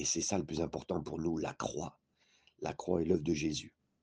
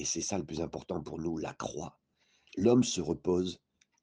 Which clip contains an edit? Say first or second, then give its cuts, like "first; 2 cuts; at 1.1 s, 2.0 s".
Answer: second; 1 cut; at 2.5 s